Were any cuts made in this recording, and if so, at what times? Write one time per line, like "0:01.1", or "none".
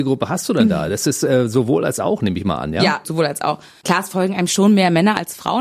0:03.0